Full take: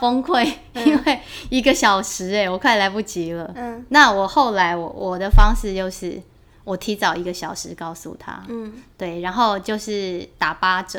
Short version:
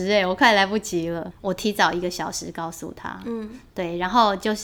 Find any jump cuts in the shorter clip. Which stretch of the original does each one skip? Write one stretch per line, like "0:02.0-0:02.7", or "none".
0:03.5-0:06.5